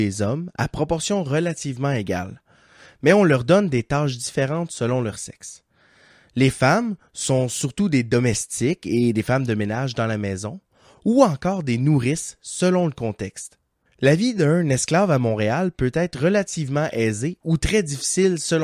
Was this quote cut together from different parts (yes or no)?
yes